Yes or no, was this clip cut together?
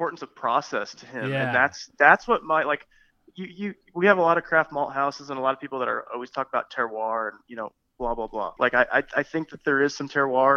yes